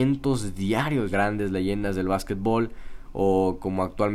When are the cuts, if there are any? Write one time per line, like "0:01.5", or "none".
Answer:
0:01.1

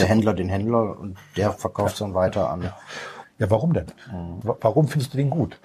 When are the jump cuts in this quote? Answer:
0:03.2
0:04.4

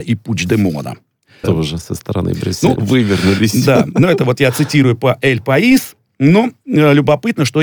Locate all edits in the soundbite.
0:01.4
0:02.8

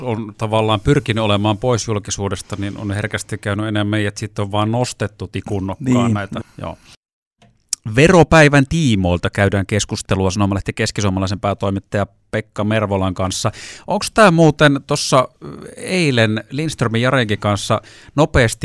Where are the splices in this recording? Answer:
0:06.4

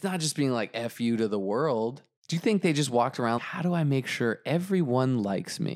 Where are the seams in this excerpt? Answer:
0:02.2
0:03.4

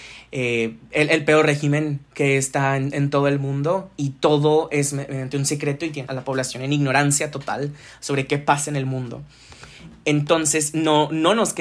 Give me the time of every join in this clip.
0:06.1

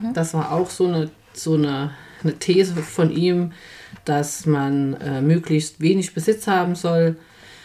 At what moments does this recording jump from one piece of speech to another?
none

